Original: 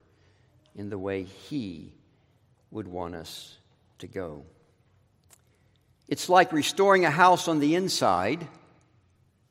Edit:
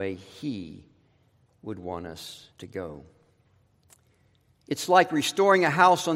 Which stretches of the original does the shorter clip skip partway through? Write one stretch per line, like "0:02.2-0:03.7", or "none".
0:03.6-0:03.9